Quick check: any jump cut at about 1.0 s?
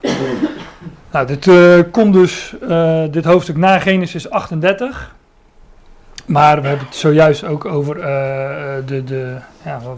no; 0 cuts

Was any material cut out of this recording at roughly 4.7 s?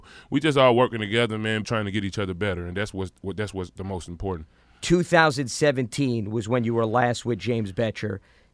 no; 1 cut; at 1.6 s

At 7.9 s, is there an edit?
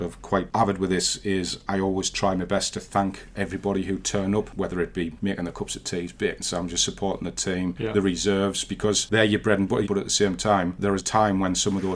no; 2 cuts; at 9.9 s, 11.0 s

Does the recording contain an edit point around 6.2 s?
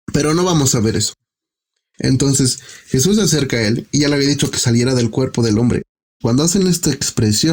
yes; 1 cut; at 6.2 s

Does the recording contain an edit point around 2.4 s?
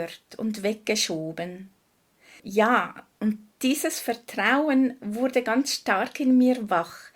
yes; 1 cut; at 2.4 s

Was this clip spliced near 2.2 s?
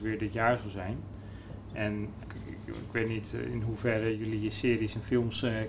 yes; 1 cut; at 2.2 s

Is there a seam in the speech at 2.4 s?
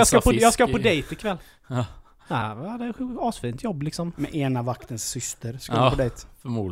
yes; 1 cut; at 2.4 s

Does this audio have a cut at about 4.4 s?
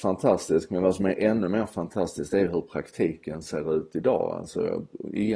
no; 0 cuts

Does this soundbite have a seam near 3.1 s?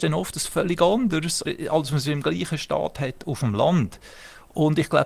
no; 1 cut; at 1.4 s

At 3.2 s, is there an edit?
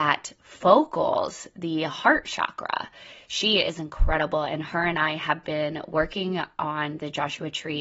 yes; 1 cut; at 3.2 s

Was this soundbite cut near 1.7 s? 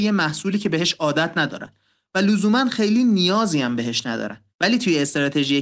no; 1 cut; at 4.5 s

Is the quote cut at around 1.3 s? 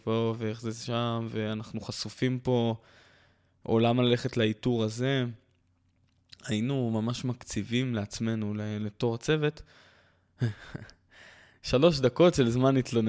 no; 0 cuts

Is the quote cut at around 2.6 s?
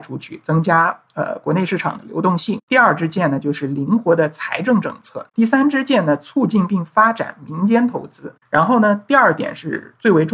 no; 2 cuts; at 5.3 s, 8.4 s

